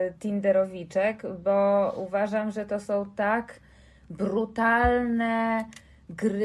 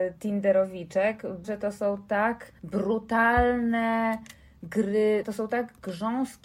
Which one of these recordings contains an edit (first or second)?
second